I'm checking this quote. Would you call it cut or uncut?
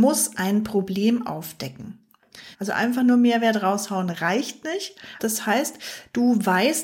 cut